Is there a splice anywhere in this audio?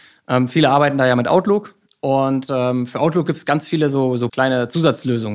yes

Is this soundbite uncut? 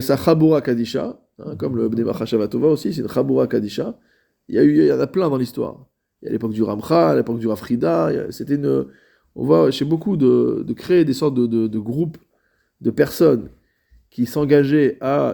yes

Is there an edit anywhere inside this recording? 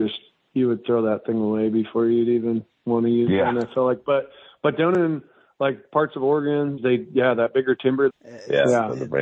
yes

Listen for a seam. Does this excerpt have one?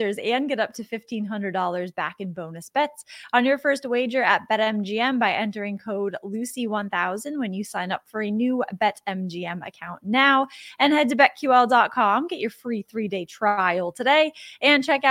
no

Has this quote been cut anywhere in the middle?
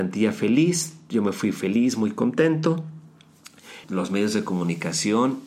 yes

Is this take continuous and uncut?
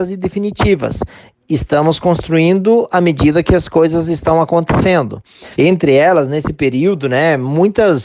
no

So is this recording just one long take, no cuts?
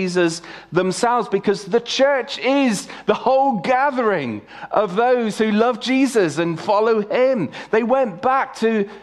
yes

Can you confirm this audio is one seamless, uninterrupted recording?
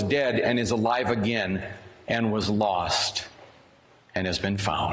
yes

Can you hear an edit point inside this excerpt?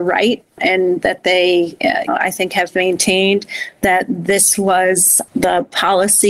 yes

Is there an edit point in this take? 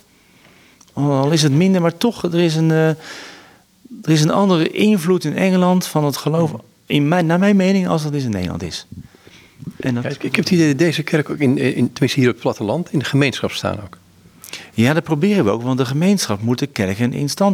no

